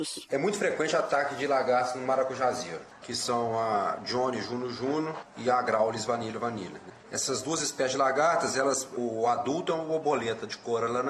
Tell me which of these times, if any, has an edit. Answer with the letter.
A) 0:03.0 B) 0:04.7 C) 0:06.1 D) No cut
A